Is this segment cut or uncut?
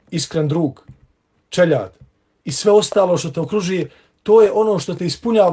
cut